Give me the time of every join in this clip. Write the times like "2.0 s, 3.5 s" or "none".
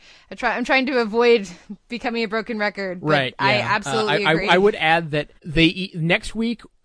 5.4 s